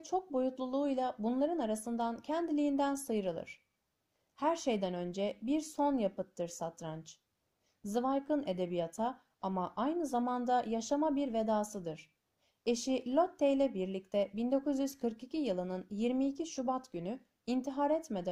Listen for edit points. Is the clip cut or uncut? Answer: uncut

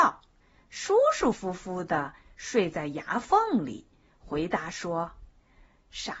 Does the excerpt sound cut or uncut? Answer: uncut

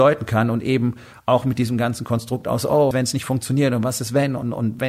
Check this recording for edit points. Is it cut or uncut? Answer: cut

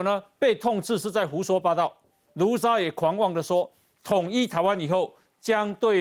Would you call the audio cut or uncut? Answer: uncut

